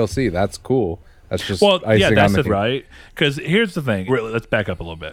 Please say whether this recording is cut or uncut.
cut